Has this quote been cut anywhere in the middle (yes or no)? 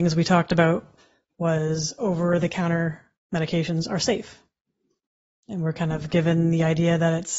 no